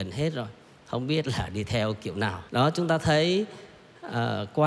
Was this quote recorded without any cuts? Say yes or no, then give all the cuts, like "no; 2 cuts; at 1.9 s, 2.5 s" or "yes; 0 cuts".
no; 1 cut; at 2.5 s